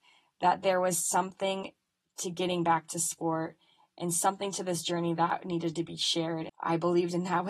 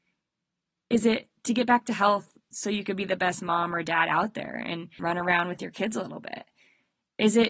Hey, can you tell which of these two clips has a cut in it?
second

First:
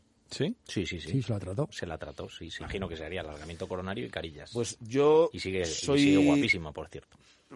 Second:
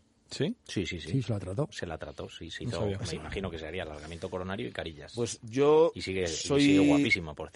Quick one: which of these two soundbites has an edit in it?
first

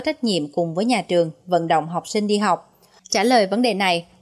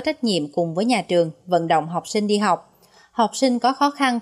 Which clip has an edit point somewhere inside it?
first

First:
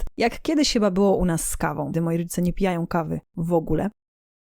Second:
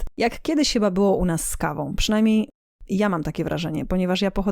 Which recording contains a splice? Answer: first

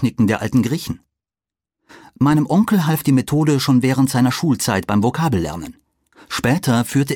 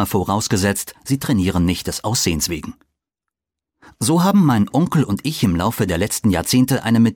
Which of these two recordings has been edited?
first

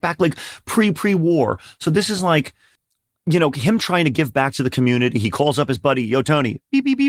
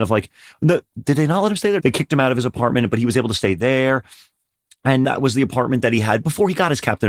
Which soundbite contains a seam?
second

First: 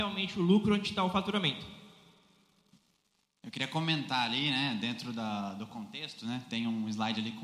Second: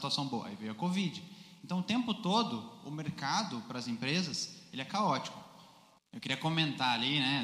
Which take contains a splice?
second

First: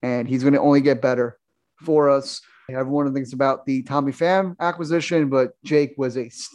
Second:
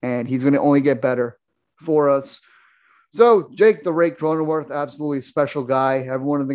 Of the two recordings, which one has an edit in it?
first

